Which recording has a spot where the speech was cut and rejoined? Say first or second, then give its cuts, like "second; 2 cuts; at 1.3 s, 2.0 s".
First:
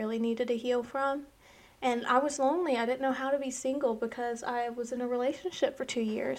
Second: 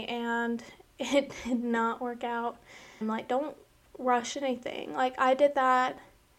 second; 1 cut; at 3.0 s